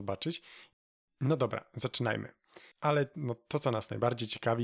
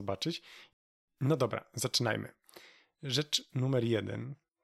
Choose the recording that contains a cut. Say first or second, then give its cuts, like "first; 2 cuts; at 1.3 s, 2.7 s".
first; 1 cut; at 2.7 s